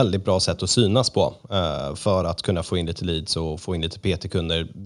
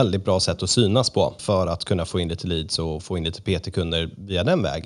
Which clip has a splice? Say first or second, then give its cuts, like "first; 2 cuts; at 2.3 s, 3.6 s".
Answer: second; 1 cut; at 1.4 s